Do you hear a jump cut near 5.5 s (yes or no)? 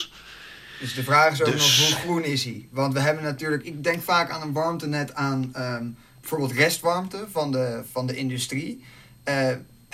no